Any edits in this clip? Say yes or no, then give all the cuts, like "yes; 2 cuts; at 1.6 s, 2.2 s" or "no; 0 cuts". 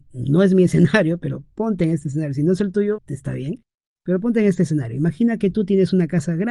yes; 1 cut; at 3.0 s